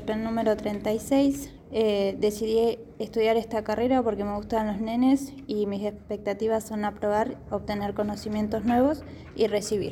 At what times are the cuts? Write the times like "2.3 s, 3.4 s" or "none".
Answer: 1.6 s